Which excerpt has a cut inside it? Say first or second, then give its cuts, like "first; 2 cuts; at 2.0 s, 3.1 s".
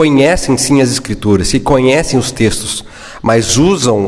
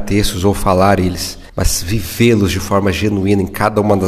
second; 1 cut; at 1.5 s